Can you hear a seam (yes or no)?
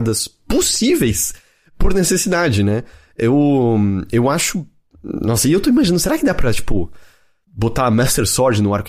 yes